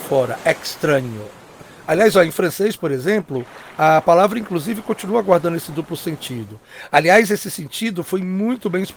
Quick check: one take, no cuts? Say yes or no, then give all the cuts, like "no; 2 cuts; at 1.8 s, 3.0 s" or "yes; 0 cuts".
yes; 0 cuts